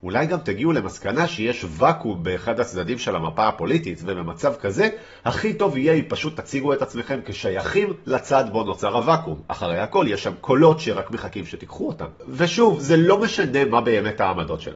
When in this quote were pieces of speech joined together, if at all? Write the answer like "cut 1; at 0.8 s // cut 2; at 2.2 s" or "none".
none